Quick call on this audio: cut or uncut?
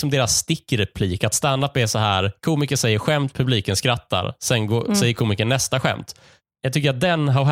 uncut